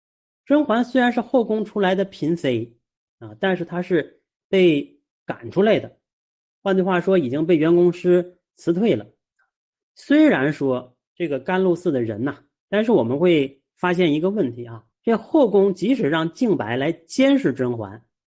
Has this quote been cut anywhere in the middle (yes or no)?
yes